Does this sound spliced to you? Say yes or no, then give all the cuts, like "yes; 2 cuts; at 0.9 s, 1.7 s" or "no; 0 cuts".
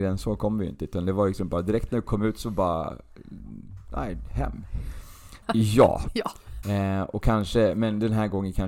yes; 2 cuts; at 5.4 s, 6.6 s